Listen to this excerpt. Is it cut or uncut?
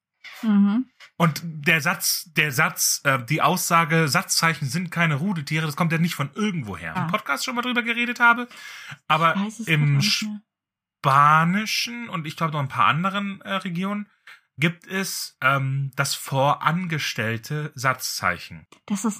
cut